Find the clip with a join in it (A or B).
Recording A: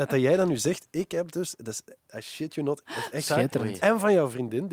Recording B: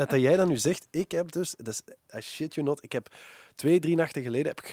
A